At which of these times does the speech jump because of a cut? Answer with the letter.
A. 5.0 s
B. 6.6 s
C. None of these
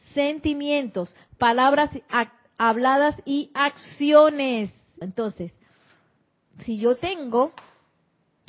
A